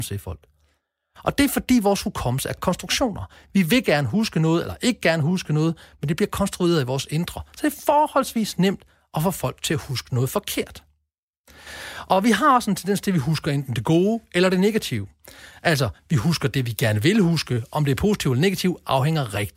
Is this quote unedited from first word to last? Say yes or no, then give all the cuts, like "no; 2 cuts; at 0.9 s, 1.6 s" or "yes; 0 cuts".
yes; 0 cuts